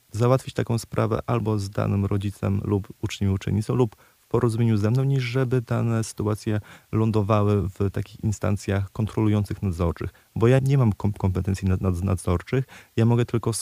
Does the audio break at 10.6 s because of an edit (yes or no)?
yes